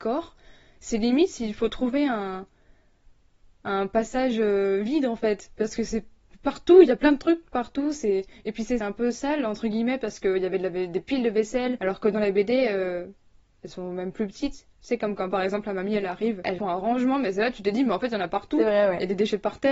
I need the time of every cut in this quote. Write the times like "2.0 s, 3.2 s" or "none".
none